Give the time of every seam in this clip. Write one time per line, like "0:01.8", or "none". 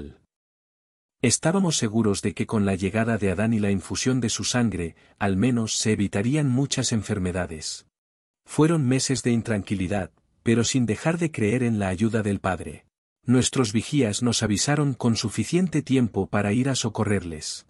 0:08.3
0:13.1